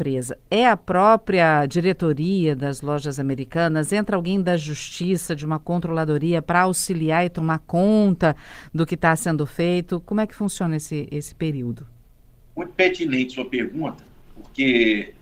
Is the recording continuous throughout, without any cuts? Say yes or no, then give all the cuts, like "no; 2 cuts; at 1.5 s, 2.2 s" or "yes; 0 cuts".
yes; 0 cuts